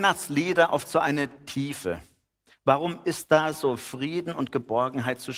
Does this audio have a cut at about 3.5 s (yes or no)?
no